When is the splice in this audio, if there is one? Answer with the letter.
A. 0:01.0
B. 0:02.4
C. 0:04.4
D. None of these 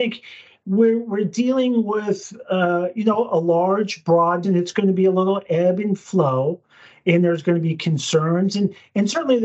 C